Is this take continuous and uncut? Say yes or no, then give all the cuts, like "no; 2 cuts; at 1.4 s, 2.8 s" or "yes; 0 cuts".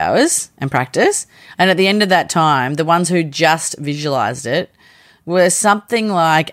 no; 1 cut; at 1.5 s